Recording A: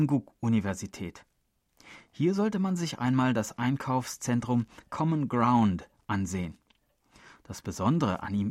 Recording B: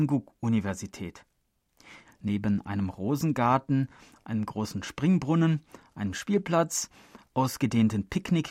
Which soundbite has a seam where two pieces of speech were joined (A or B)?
B